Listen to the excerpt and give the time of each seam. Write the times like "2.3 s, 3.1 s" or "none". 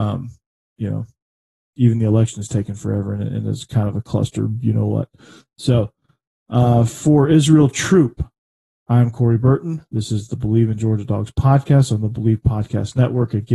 none